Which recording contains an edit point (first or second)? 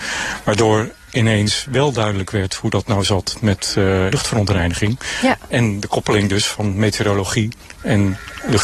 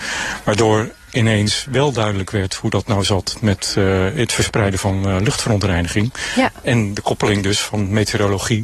first